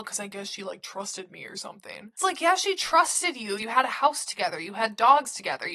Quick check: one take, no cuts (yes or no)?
no